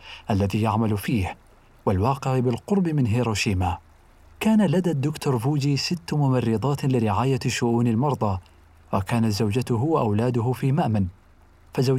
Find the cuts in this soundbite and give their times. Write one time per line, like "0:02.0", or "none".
none

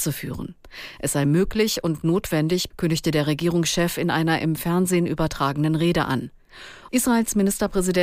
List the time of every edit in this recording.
0:02.7
0:06.9

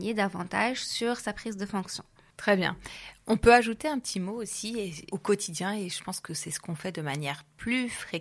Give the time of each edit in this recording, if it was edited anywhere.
0:05.1

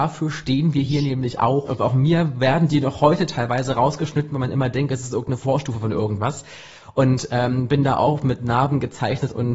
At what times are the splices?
0:01.7

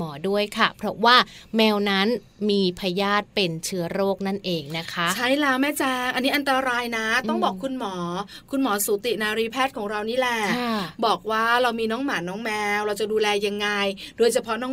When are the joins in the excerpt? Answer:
none

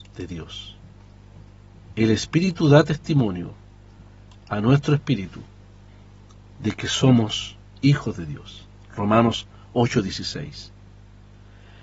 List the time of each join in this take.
none

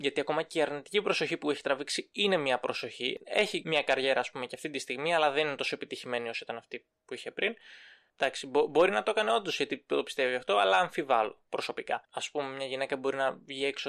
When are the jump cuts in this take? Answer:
0:12.0

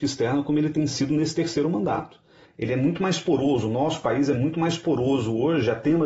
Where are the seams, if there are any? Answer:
0:02.4

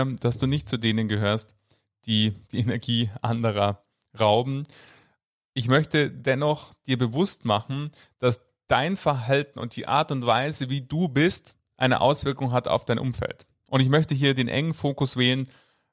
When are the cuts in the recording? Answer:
none

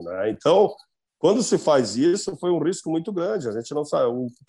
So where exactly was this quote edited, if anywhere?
none

